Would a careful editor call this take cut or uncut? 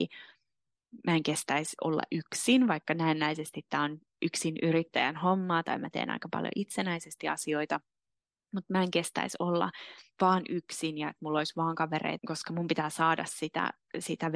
cut